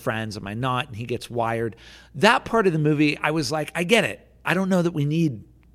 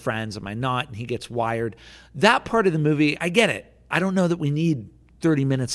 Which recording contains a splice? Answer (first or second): second